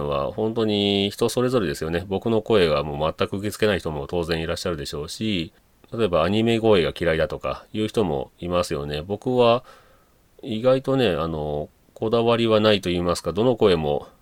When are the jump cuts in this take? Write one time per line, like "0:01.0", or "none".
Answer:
none